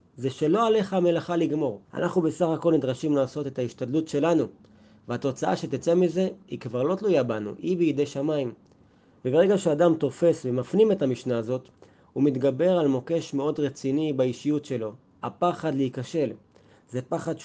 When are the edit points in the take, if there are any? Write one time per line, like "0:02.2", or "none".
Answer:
0:01.8

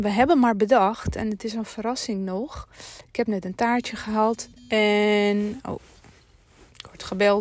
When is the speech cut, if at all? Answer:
0:04.6

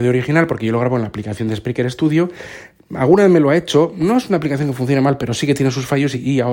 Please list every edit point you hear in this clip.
none

